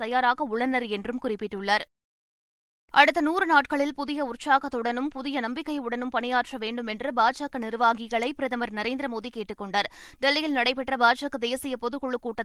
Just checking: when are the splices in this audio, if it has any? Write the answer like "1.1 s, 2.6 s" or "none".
none